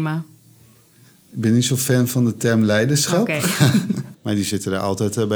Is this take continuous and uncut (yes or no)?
no